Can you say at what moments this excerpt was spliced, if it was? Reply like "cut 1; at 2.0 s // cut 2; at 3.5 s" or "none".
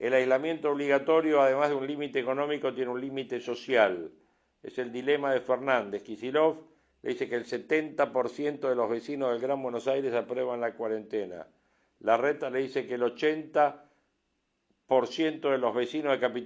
none